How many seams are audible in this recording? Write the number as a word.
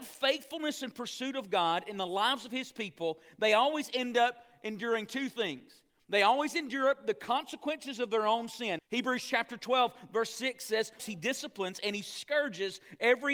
two